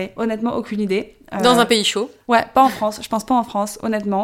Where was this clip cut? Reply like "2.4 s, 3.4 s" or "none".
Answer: none

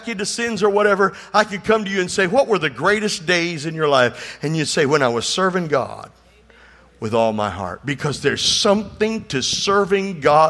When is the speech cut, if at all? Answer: none

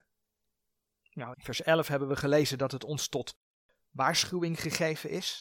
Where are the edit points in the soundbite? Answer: 1.3 s

